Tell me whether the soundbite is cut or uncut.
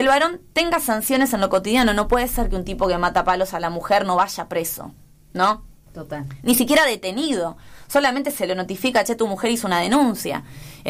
uncut